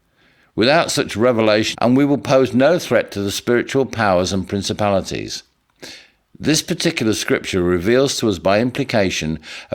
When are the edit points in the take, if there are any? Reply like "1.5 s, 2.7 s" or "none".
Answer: 1.7 s